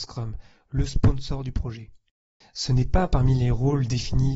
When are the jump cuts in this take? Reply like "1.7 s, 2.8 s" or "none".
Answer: 2.4 s